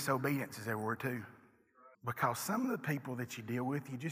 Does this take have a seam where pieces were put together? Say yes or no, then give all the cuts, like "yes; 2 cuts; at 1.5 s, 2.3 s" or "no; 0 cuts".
yes; 1 cut; at 1.9 s